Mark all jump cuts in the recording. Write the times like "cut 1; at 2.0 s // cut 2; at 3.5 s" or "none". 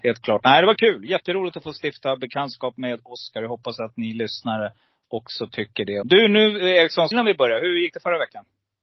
cut 1; at 6.0 s // cut 2; at 7.1 s